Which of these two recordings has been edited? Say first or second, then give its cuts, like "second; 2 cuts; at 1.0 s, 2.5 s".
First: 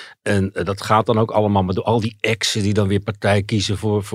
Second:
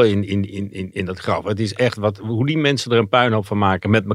second; 1 cut; at 0.9 s